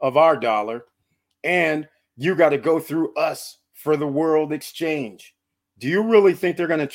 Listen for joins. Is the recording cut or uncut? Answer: cut